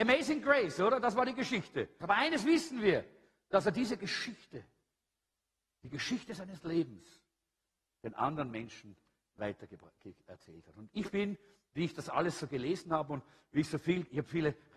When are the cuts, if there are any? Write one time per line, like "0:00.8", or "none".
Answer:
0:02.0

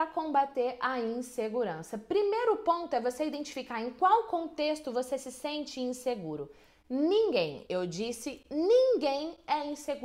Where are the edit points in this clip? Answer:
none

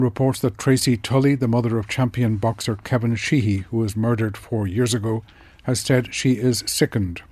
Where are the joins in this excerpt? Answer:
none

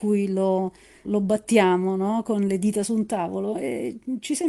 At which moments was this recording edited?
0:01.0

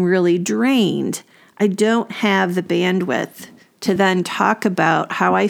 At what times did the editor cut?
none

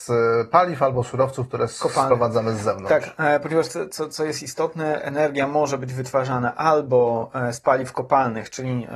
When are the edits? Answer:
none

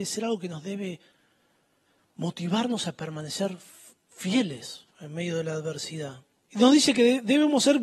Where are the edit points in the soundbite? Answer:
0:04.9
0:06.5

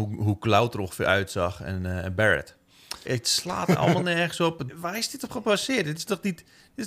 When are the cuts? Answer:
0:03.1
0:04.7

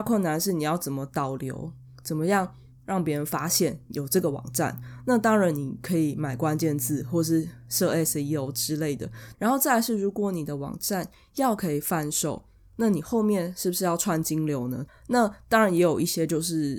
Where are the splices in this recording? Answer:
0:09.3
0:14.9

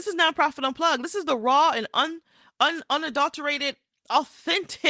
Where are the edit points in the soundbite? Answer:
none

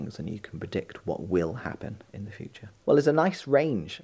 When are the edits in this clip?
0:02.8

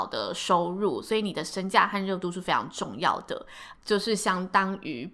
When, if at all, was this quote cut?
0:03.7

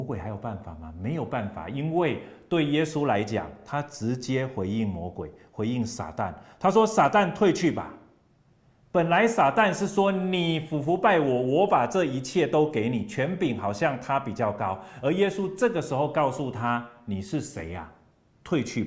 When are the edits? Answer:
none

